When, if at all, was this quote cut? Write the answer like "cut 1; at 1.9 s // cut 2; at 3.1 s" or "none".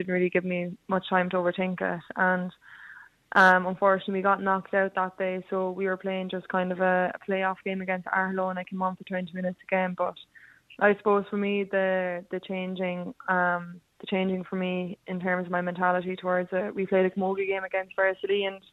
none